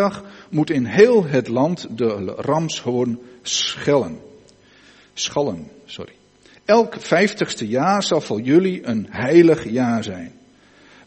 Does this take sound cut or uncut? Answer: uncut